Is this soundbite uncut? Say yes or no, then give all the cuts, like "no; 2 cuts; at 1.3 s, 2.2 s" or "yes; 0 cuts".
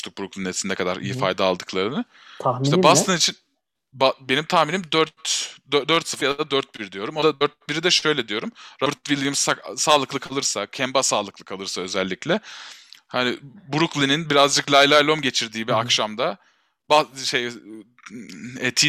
yes; 0 cuts